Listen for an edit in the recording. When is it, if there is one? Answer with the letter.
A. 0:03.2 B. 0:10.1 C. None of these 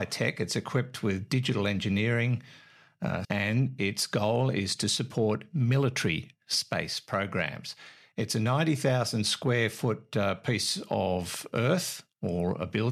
A